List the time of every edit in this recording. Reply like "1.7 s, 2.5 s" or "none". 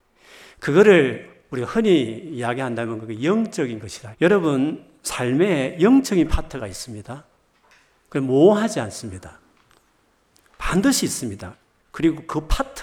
4.1 s